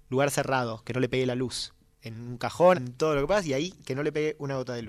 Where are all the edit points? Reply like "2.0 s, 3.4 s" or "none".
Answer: 2.7 s

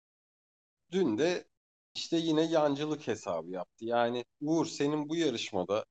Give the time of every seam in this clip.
4.3 s

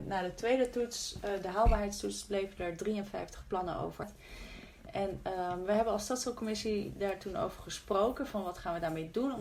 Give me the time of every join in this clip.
none

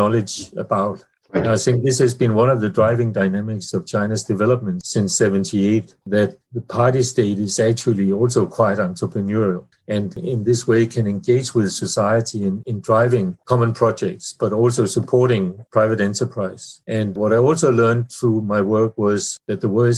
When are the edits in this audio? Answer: 12.6 s

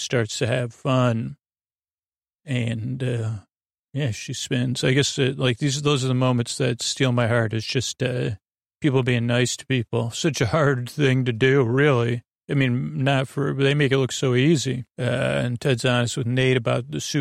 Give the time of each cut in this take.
14.9 s

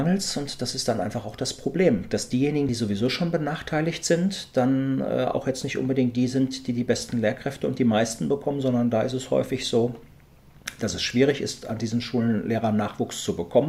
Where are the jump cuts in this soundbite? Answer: none

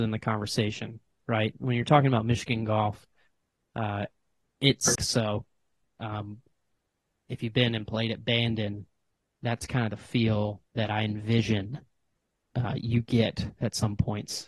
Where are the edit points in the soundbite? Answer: 5.0 s, 10.7 s

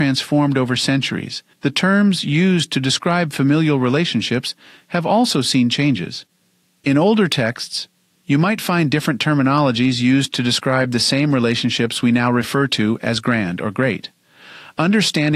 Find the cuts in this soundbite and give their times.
1.5 s

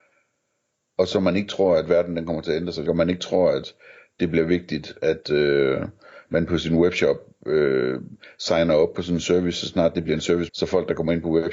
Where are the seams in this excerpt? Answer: 2.9 s, 10.5 s

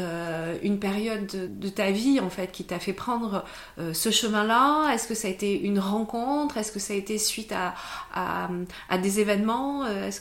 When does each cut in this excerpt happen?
1.5 s

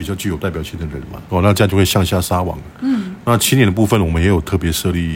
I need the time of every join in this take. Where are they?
1.3 s

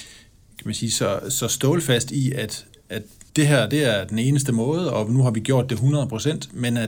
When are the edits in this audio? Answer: 3.3 s

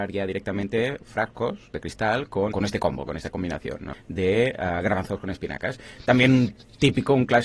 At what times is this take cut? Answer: 2.5 s

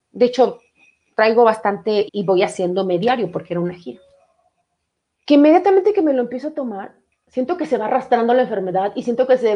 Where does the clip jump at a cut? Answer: 2.1 s, 5.1 s

